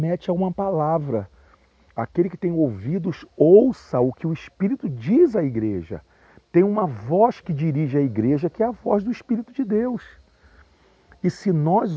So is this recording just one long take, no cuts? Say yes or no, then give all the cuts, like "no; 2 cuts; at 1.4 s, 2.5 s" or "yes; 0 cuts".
yes; 0 cuts